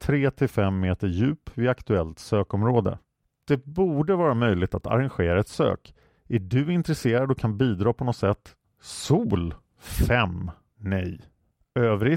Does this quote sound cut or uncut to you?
cut